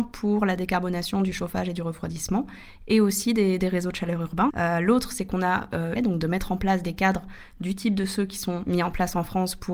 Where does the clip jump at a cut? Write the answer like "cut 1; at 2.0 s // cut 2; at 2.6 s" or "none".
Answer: cut 1; at 4.5 s // cut 2; at 6.0 s